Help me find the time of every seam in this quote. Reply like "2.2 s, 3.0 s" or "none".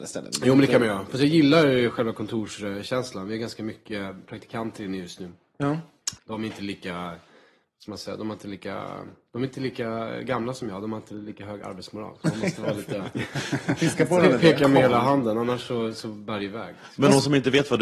6.2 s